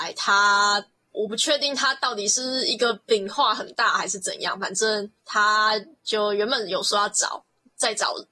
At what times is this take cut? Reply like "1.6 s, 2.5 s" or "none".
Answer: 1.1 s, 5.2 s